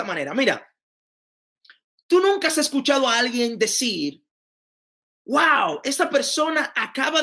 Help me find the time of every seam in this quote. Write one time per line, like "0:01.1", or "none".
none